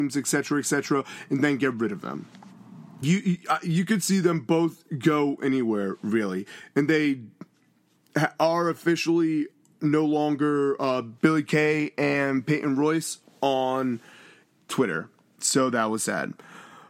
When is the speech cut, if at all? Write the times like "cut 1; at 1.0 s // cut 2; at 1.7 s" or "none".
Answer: cut 1; at 3.0 s // cut 2; at 11.2 s